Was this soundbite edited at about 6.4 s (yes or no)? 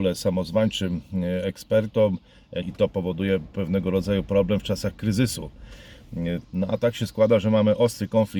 yes